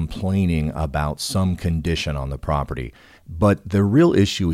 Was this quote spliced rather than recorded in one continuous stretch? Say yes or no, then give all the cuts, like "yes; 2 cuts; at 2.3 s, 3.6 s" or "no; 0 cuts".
yes; 1 cut; at 3.2 s